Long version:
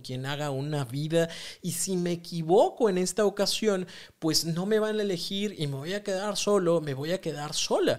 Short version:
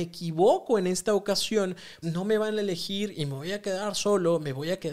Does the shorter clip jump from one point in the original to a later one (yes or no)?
yes